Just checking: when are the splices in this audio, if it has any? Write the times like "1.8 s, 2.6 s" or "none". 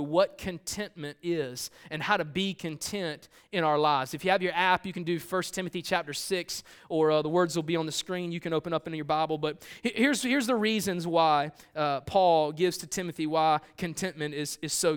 none